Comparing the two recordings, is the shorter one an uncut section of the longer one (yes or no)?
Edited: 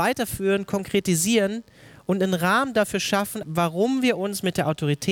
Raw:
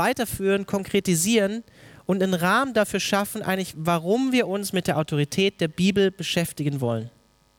no